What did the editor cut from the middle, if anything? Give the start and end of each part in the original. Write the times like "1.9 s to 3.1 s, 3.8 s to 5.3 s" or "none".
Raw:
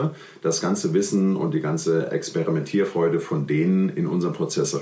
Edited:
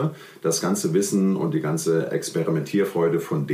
none